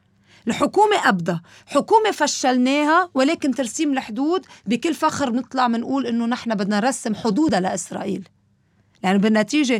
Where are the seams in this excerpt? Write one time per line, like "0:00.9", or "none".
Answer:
none